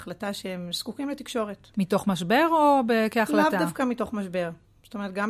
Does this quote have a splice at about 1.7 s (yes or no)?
yes